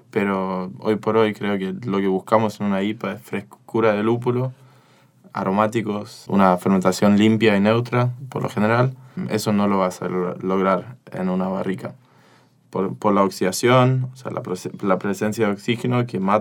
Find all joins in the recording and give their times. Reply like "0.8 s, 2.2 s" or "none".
none